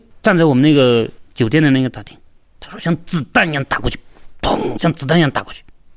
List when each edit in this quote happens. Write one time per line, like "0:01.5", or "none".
none

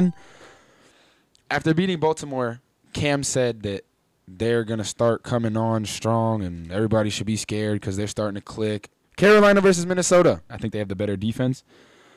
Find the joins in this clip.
0:09.0
0:10.5

